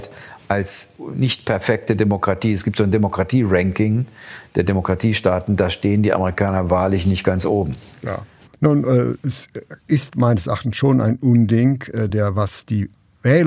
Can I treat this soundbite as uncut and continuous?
no; 2 cuts; at 8.5 s, 12.1 s

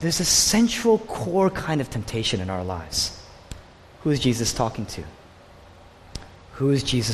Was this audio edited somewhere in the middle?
no; 0 cuts

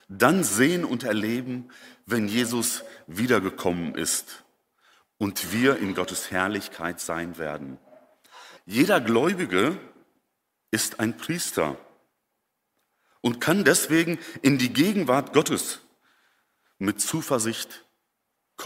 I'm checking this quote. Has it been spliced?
yes; 1 cut; at 8.6 s

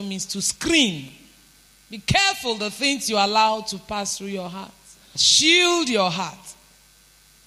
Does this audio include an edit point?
yes; 1 cut; at 5.2 s

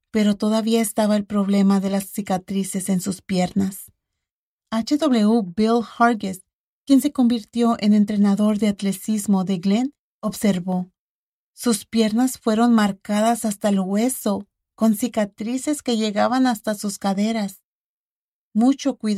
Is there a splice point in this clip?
no; 0 cuts

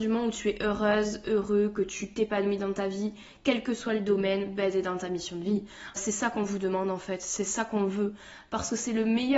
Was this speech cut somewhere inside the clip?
yes; 1 cut; at 6.0 s

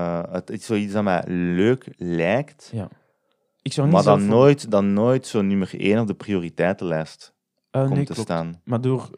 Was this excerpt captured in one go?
yes; 0 cuts

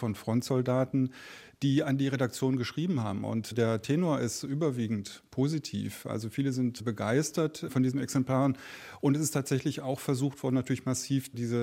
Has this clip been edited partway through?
no; 0 cuts

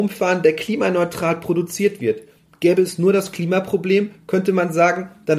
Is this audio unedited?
yes; 0 cuts

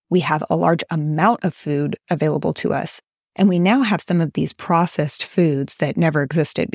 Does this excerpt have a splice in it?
no; 0 cuts

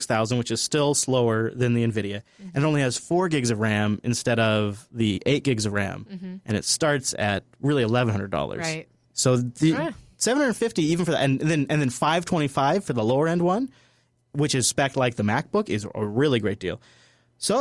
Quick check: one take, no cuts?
yes; 0 cuts

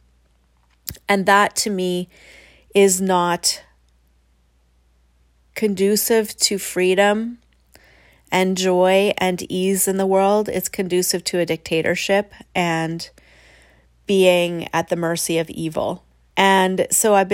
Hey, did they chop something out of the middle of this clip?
yes; 1 cut; at 16.3 s

